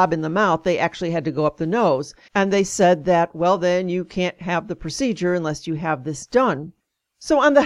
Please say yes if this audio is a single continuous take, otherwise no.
no